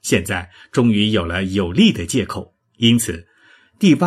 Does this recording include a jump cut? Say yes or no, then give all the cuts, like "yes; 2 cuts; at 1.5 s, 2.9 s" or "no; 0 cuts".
yes; 1 cut; at 2.6 s